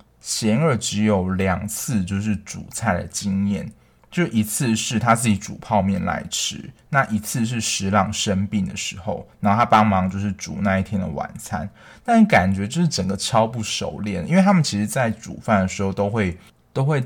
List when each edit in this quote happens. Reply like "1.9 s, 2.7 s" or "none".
none